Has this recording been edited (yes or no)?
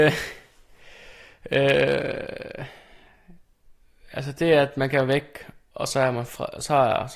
no